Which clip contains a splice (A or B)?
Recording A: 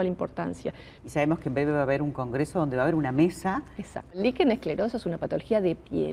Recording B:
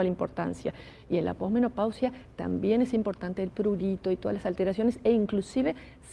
A